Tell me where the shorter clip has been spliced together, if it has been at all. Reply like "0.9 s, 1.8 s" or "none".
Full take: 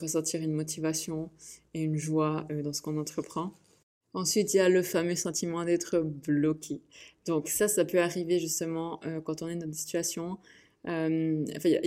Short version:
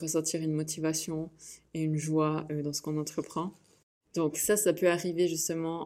4.0 s